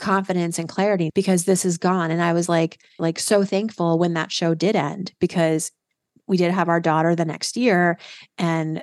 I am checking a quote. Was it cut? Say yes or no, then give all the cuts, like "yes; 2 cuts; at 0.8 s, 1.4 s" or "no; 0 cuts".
yes; 2 cuts; at 1.1 s, 3.0 s